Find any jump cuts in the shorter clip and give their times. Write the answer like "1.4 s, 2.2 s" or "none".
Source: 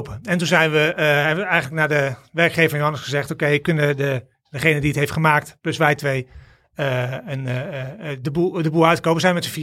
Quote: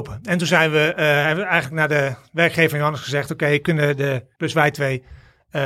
4.4 s